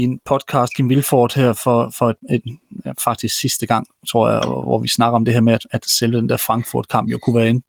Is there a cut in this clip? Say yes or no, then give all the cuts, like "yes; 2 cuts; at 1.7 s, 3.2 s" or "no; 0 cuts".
no; 0 cuts